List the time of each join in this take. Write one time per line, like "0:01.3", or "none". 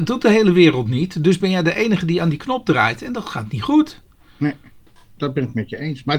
0:05.2